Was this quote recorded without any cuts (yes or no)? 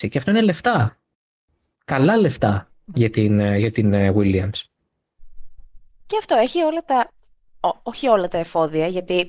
no